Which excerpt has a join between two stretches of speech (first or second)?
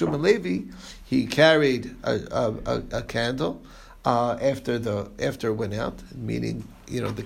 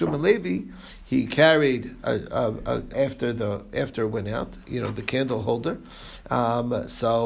second